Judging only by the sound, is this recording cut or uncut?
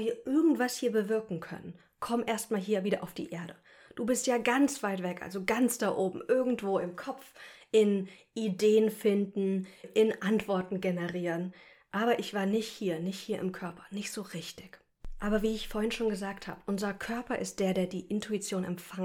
cut